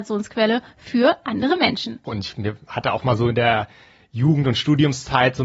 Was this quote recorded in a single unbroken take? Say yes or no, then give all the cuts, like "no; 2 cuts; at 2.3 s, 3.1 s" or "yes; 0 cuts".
no; 1 cut; at 2.1 s